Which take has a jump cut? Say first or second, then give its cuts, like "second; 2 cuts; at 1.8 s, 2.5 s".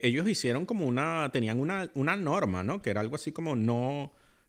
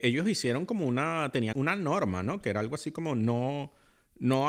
second; 1 cut; at 1.5 s